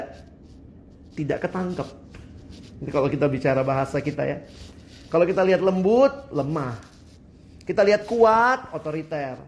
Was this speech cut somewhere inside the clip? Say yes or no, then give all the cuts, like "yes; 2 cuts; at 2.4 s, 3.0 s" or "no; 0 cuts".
yes; 1 cut; at 5.1 s